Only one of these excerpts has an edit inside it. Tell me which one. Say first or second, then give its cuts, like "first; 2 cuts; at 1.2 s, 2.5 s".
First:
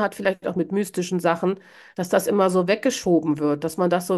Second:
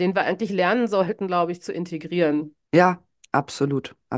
second; 1 cut; at 2.6 s